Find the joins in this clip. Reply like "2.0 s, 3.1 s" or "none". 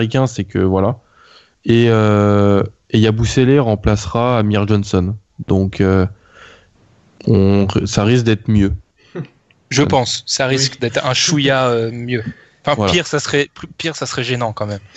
none